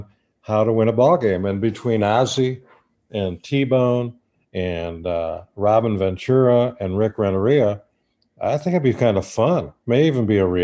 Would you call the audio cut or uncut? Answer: uncut